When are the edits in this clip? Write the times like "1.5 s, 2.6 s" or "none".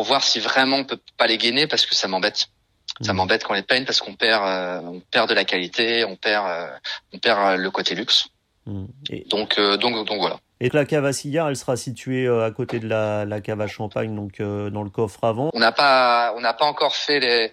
10.7 s, 15.5 s